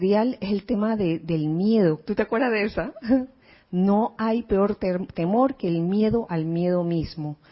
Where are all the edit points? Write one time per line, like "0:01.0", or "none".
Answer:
0:02.1